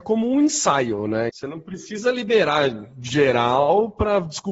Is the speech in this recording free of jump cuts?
no; 1 cut; at 1.3 s

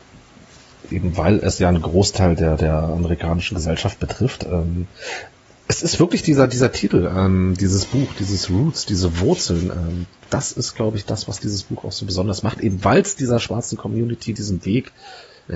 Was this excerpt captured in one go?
yes; 0 cuts

